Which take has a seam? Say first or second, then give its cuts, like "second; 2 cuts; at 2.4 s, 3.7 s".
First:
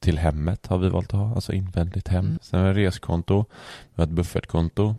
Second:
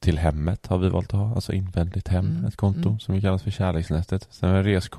first; 1 cut; at 2.4 s